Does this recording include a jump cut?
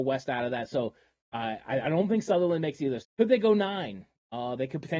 yes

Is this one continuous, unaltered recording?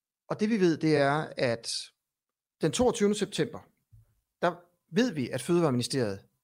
yes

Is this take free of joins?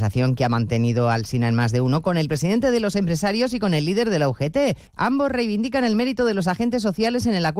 no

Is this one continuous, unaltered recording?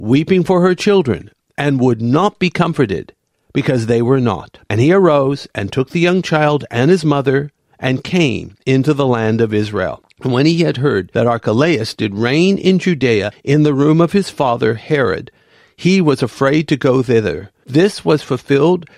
no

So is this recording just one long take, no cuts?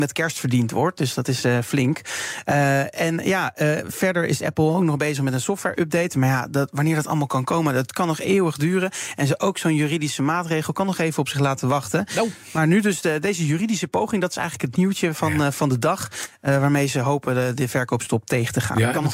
yes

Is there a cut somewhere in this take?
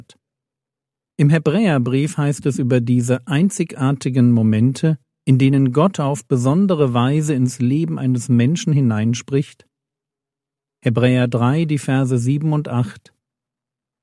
no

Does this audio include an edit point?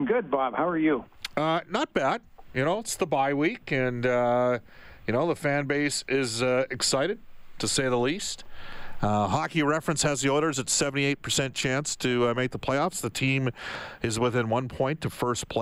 no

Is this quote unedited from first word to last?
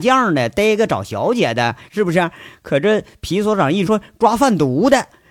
no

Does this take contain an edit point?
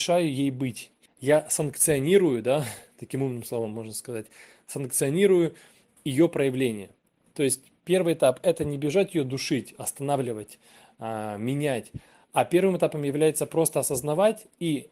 yes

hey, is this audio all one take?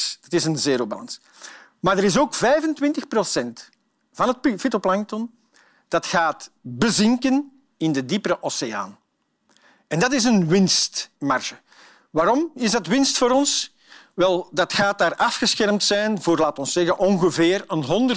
yes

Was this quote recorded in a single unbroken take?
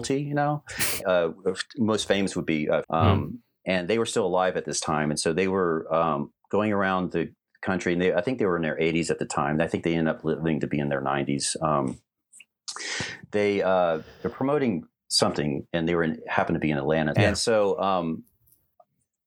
no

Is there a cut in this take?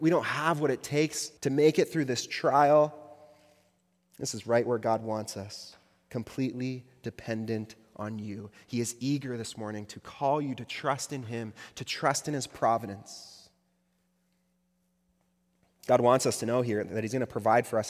yes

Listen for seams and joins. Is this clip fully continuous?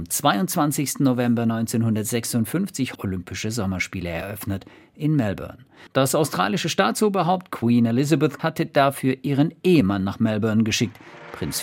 no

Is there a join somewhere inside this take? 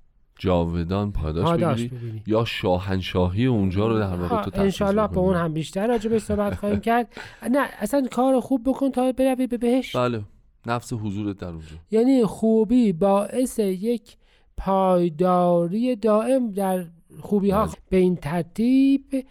yes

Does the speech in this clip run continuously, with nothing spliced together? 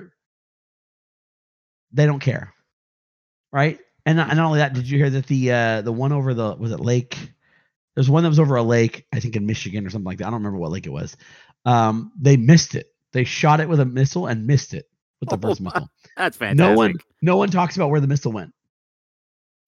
yes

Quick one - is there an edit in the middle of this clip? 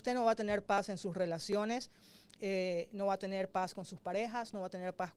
no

